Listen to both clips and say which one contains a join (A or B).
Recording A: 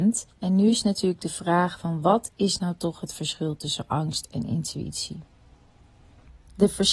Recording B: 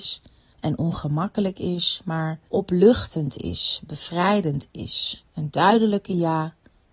B